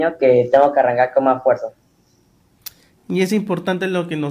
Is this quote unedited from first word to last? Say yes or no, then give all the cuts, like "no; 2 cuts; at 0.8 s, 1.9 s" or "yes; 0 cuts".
yes; 0 cuts